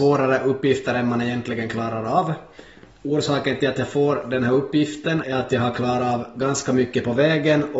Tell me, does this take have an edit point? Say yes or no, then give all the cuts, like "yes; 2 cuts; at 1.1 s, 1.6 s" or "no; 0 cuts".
yes; 1 cut; at 5.2 s